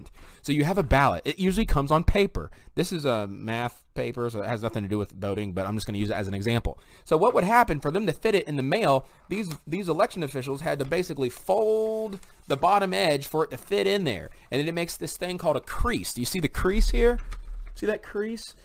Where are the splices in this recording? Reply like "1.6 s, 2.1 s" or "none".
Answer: none